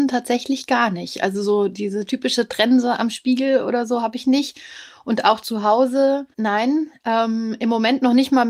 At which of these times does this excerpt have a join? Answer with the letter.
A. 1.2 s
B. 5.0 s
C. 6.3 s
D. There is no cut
C